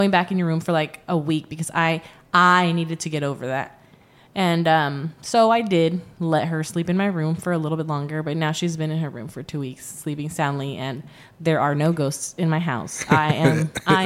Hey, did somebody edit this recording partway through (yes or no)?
no